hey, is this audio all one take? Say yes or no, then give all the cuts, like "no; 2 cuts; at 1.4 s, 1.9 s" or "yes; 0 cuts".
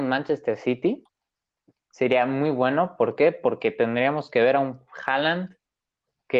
yes; 0 cuts